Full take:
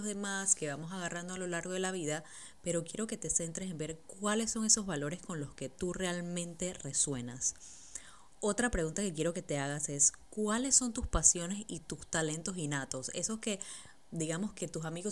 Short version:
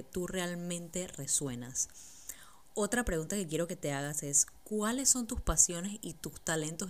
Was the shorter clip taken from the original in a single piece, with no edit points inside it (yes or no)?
yes